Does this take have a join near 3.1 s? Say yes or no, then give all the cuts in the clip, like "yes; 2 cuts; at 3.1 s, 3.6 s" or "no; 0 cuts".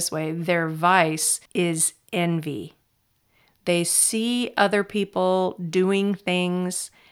no; 1 cut; at 1.5 s